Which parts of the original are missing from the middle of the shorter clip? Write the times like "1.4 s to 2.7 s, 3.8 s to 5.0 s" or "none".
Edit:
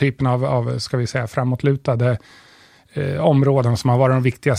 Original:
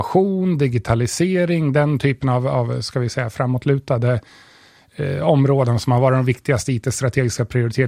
none